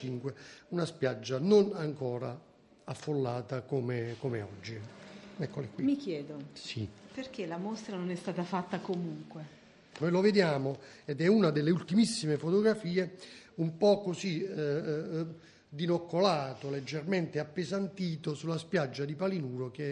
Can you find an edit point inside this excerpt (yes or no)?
yes